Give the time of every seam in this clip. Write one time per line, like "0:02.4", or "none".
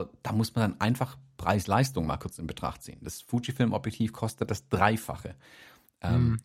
none